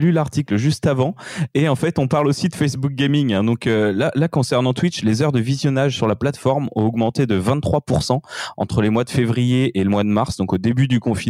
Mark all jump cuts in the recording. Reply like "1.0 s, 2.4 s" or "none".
none